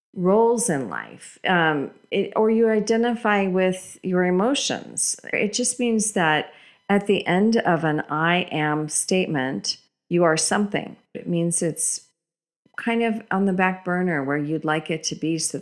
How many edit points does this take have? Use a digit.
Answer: 2